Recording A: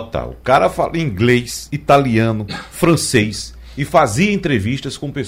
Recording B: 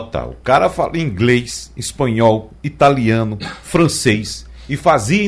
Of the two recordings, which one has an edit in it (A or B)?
A